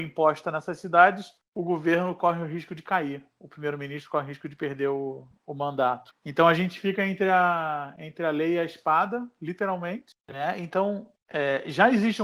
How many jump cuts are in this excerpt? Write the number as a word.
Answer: one